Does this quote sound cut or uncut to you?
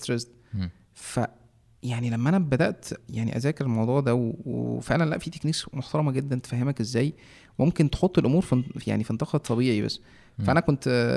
uncut